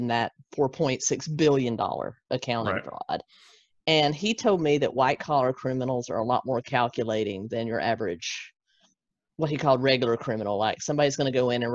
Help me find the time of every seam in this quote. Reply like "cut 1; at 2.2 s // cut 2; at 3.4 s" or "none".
none

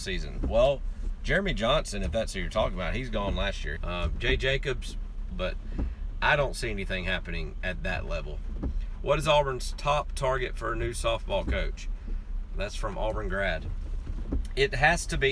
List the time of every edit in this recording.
cut 1; at 3.8 s // cut 2; at 5.3 s

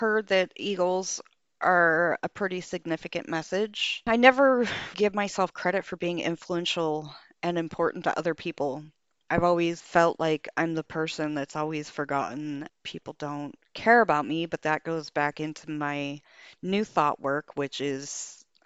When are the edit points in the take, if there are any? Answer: cut 1; at 4.9 s

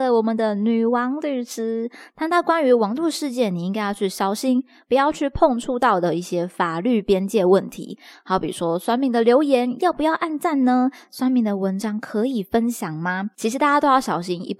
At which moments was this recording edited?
cut 1; at 13.3 s

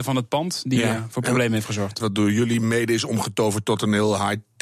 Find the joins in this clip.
cut 1; at 2.0 s

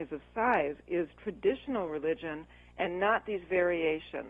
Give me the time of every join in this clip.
none

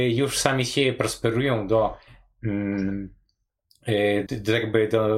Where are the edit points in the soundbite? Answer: cut 1; at 4.3 s

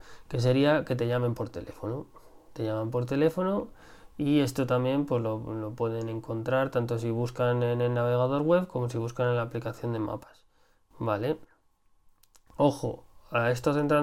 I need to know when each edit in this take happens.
none

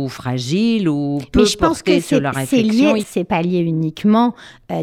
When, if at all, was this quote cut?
cut 1; at 3.0 s

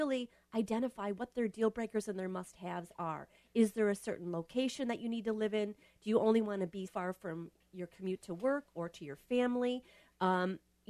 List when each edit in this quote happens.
cut 1; at 6.9 s

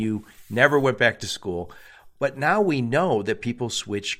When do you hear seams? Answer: none

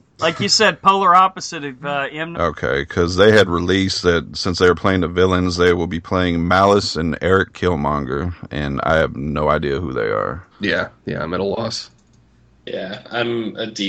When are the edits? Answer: cut 1; at 2.3 s // cut 2; at 10.5 s

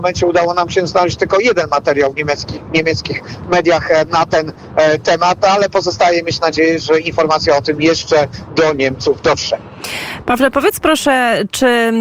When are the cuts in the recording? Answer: none

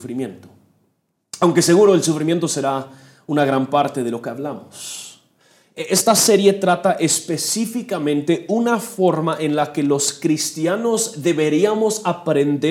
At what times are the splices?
none

